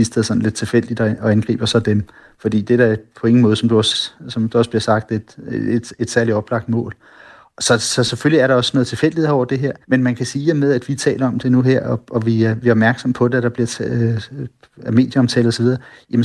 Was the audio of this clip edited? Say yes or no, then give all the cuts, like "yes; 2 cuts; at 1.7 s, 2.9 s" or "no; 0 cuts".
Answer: yes; 2 cuts; at 9.8 s, 12.0 s